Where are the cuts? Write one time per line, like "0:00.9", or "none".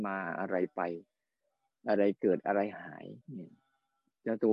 0:03.2